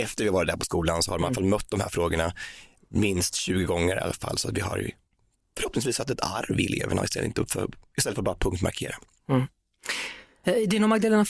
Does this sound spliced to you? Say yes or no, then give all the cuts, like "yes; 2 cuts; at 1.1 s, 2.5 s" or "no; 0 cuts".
no; 0 cuts